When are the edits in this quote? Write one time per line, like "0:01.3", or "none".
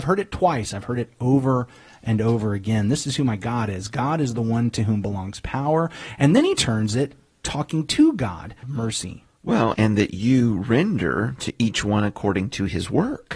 0:08.6
0:09.7